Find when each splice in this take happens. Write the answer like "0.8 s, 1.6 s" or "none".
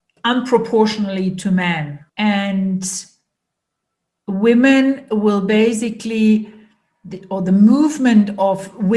2.1 s